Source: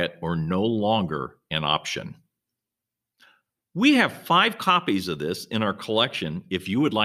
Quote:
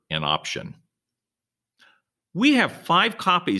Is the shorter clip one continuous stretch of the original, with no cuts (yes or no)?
yes